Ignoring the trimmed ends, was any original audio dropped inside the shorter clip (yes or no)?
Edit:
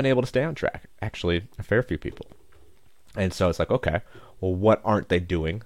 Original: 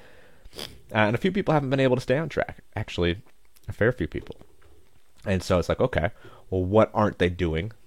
yes